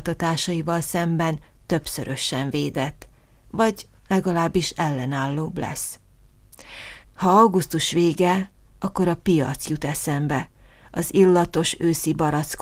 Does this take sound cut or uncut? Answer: cut